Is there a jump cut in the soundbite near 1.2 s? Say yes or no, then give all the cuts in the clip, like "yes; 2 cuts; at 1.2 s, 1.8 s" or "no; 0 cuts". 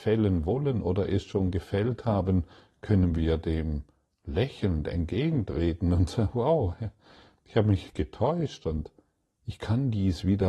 no; 0 cuts